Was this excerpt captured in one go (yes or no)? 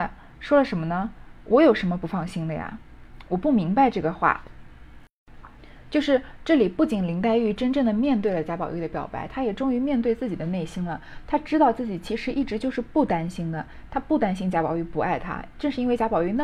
yes